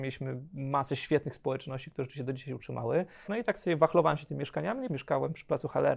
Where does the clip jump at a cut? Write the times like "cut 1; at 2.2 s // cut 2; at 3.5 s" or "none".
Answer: cut 1; at 3.2 s // cut 2; at 4.9 s